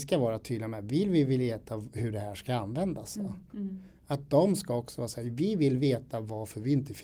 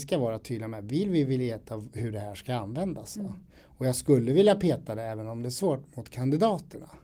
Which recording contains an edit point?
first; 1 cut; at 3.5 s

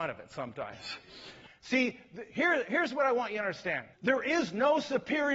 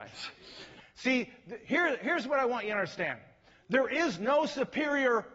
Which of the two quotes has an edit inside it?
first; 1 cut; at 3.9 s

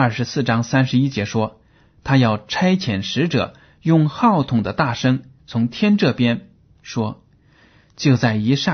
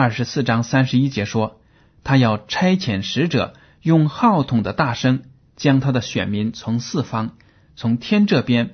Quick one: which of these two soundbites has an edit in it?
first; 2 cuts; at 5.4 s, 6.7 s

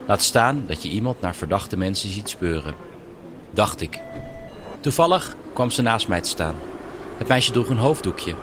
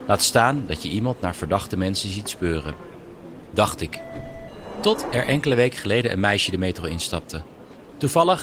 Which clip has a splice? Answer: first; 1 cut; at 4.7 s

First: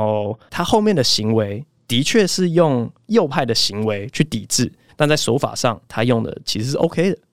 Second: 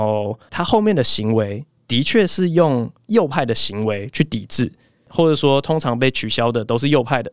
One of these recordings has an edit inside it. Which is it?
first; 1 cut; at 4.9 s

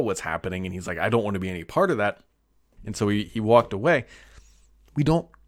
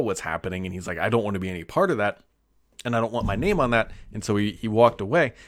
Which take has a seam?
first; 1 cut; at 2.8 s

